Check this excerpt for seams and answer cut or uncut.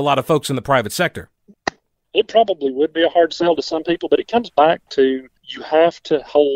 cut